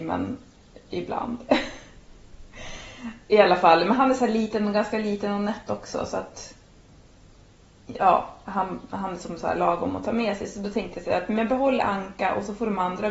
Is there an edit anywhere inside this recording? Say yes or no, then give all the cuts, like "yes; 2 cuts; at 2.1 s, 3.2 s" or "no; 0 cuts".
no; 0 cuts